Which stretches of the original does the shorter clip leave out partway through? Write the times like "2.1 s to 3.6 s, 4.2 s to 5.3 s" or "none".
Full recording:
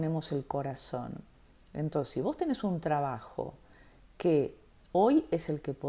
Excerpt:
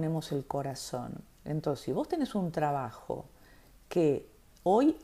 1.3 s to 1.6 s